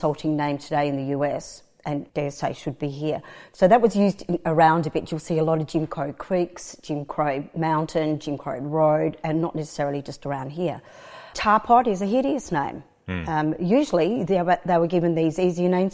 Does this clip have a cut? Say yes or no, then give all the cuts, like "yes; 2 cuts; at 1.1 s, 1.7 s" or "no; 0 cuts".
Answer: no; 0 cuts